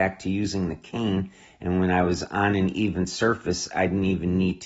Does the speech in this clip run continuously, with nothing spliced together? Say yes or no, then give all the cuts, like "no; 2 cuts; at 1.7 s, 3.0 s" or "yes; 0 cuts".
yes; 0 cuts